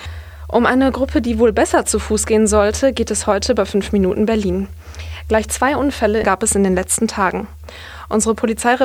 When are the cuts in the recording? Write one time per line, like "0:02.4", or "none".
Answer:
0:06.2